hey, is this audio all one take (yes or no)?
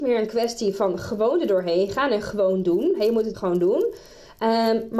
no